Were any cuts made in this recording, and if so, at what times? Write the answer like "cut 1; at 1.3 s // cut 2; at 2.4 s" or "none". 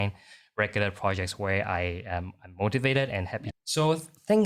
cut 1; at 3.5 s